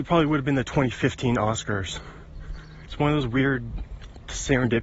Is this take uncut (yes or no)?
no